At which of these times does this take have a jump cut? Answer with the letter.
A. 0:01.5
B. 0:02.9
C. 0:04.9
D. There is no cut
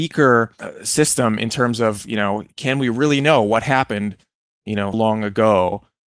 C